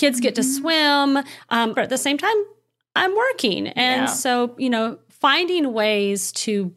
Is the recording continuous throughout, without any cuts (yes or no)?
no